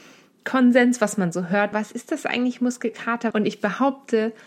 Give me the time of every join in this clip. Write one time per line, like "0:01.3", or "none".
0:01.7
0:03.3